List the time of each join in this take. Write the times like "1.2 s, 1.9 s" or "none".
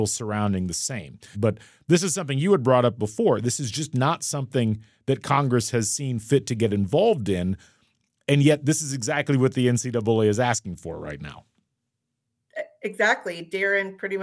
1.3 s